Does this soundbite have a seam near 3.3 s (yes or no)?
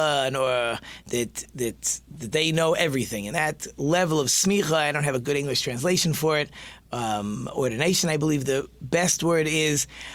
no